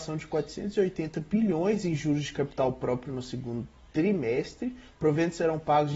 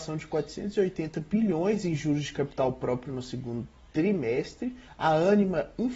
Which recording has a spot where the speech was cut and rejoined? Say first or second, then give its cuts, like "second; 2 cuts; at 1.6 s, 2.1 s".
second; 1 cut; at 4.9 s